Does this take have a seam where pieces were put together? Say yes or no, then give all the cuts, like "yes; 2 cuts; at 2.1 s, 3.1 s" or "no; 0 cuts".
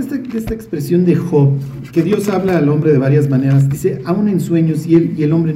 no; 0 cuts